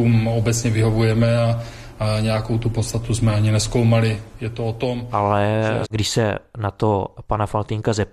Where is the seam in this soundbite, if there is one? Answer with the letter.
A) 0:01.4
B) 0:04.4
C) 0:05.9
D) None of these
C